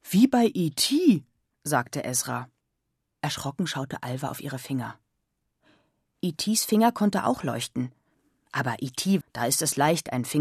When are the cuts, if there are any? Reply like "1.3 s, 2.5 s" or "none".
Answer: 9.2 s